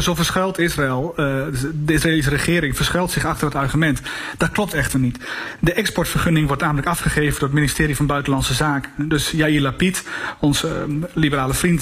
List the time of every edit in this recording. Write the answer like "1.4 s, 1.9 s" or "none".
none